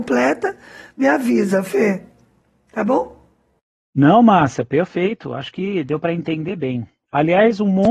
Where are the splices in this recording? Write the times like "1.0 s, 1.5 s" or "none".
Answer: none

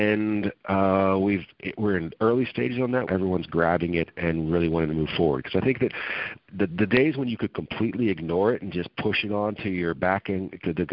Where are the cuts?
3.1 s

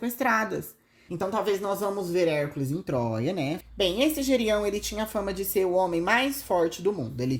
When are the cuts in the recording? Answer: 1.1 s, 3.6 s

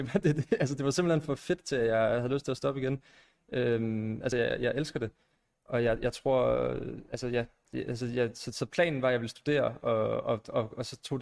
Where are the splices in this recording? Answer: none

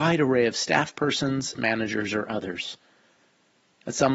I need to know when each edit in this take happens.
1.6 s

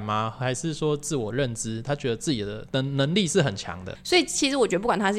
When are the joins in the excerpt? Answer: 4.0 s

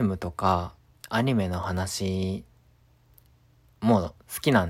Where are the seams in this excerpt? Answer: none

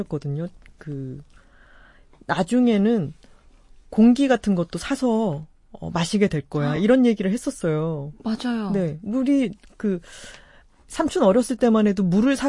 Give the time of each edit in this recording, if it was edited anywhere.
none

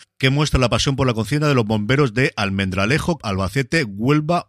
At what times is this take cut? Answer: 3.2 s

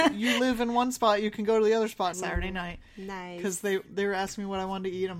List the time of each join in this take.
2.1 s

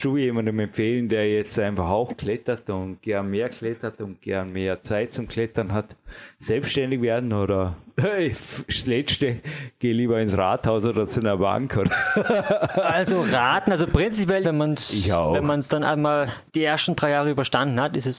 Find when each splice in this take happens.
14.4 s, 16.5 s

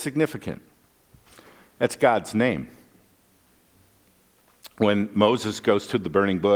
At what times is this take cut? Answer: none

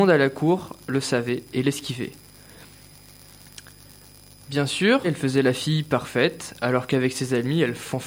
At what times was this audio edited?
5.0 s

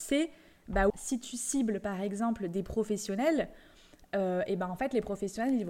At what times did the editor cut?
0.9 s

